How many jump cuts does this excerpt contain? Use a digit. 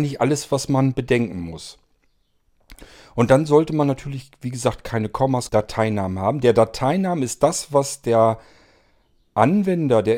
1